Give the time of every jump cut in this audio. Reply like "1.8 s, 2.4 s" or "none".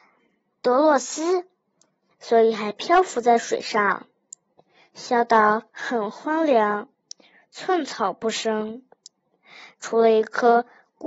2.1 s